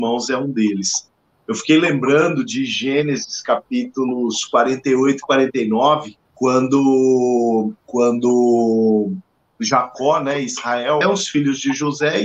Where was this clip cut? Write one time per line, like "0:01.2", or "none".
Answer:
0:06.2
0:07.8
0:11.0